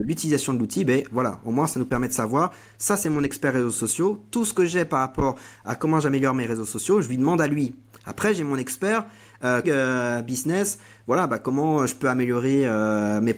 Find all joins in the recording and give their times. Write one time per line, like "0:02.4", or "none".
0:09.6